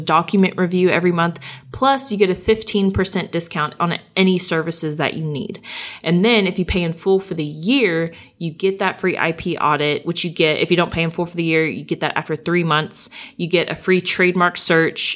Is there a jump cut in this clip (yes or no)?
no